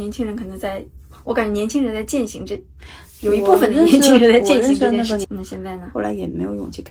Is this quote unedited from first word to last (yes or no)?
no